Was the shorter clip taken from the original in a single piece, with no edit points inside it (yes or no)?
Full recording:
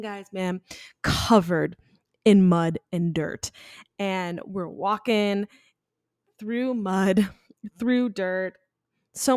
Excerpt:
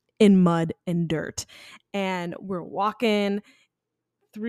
yes